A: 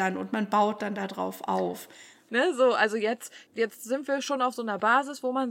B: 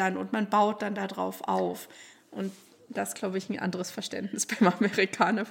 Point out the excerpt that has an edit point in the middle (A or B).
A